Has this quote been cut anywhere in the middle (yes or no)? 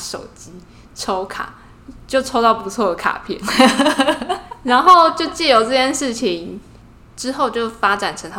no